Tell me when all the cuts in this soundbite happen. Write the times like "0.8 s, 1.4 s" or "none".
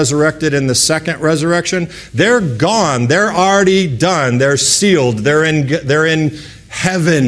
none